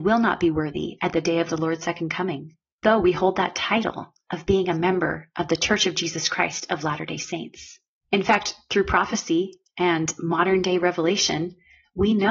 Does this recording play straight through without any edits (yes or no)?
no